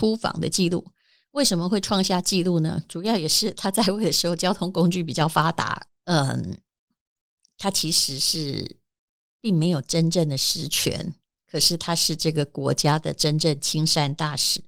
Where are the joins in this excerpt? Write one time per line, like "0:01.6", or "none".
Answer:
0:05.9